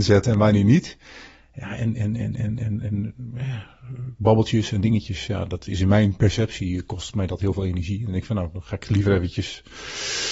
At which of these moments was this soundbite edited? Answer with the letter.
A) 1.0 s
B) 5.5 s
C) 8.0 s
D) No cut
D